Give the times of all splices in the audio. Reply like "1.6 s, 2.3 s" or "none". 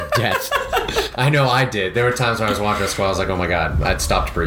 none